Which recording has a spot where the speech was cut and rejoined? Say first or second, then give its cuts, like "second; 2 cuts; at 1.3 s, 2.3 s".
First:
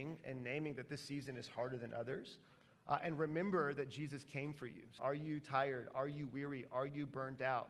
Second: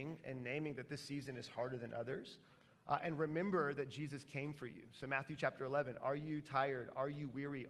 first; 1 cut; at 5.0 s